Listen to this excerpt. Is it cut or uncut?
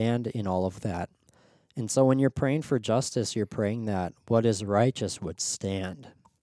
uncut